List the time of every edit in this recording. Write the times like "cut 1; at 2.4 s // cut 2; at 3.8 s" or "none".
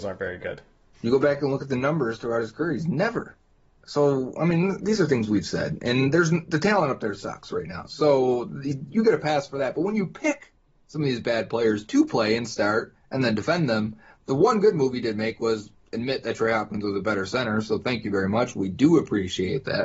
cut 1; at 0.9 s